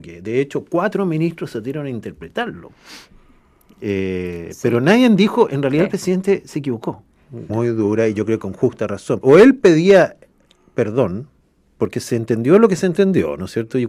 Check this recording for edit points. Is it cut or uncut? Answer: cut